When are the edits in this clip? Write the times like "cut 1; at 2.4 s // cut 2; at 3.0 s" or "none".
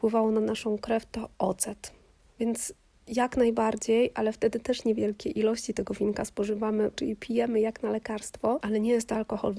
cut 1; at 2.3 s // cut 2; at 6.9 s